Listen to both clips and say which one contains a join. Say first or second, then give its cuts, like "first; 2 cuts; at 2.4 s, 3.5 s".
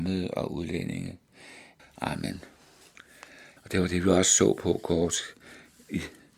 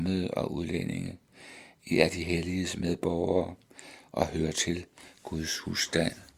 first; 2 cuts; at 1.8 s, 3.6 s